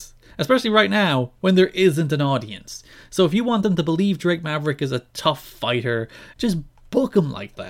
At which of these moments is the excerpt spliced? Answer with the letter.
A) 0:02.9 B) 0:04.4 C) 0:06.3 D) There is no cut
C